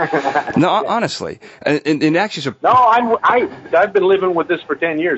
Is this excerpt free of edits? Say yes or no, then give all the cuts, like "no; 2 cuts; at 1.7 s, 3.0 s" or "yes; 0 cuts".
no; 1 cut; at 3.7 s